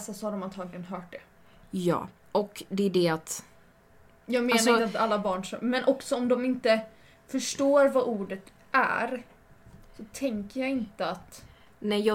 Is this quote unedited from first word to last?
yes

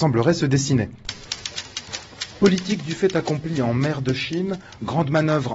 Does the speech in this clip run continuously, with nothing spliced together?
yes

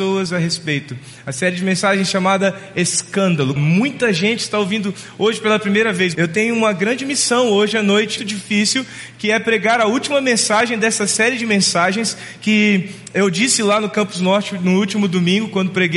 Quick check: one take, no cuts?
no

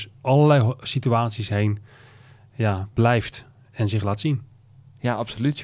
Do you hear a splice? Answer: no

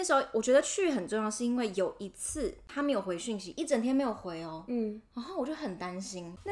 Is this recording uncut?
yes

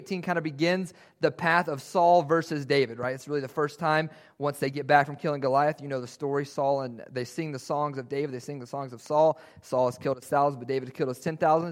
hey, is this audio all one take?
yes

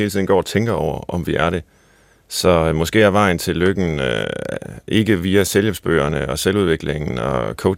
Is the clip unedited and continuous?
yes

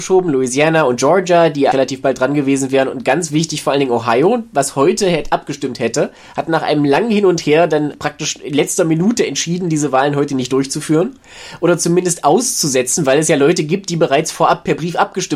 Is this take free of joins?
no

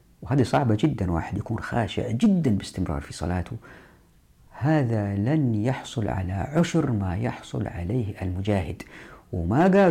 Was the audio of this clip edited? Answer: no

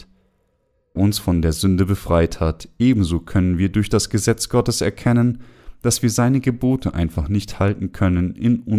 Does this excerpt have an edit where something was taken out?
yes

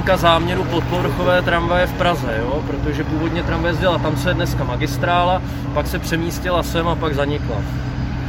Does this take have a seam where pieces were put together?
no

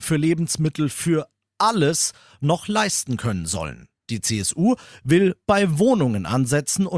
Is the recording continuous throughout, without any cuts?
yes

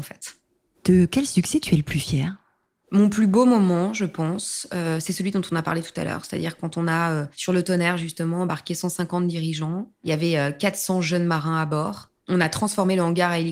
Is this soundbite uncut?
yes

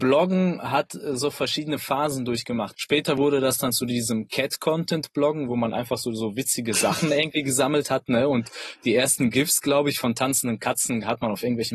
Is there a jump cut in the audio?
yes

